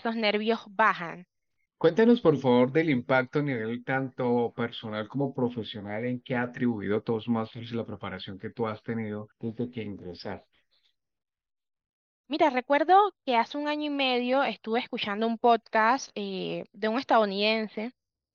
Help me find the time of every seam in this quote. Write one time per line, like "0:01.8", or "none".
0:01.7
0:09.3